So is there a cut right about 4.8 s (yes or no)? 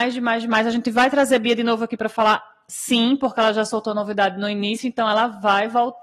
no